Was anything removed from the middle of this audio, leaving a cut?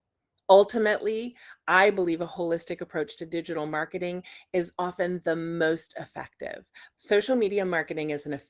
yes; 1 cut; at 6.9 s

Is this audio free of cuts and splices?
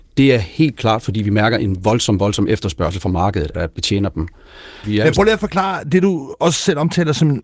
no; 2 cuts; at 3.5 s, 4.8 s

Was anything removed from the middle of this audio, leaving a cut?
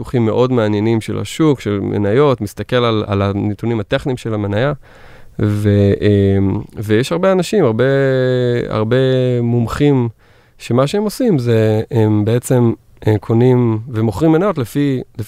yes; 1 cut; at 3.1 s

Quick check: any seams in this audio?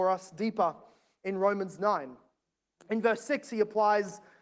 no; 0 cuts

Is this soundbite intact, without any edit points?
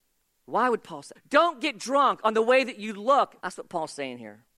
no; 2 cuts; at 1.1 s, 3.4 s

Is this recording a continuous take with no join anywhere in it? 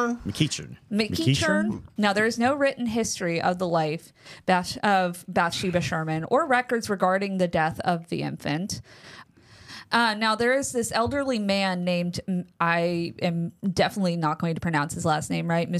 no; 2 cuts; at 2.0 s, 9.2 s

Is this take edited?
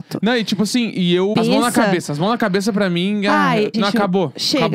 yes; 2 cuts; at 1.3 s, 3.7 s

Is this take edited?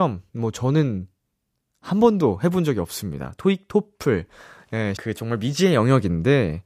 yes; 1 cut; at 5.0 s

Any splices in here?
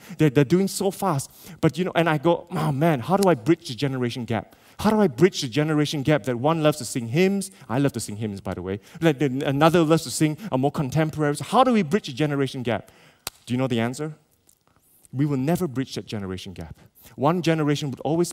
no; 0 cuts

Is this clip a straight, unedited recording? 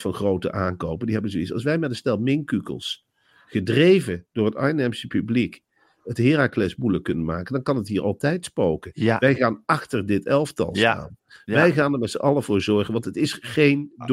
yes; 0 cuts

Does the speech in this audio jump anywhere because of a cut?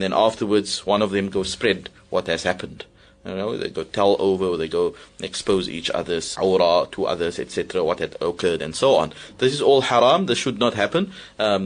yes; 1 cut; at 6.3 s

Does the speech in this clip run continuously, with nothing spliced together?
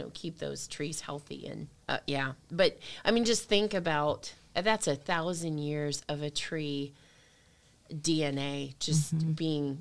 yes; 0 cuts

